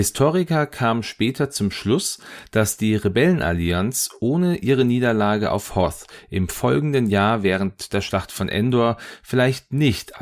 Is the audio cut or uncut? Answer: uncut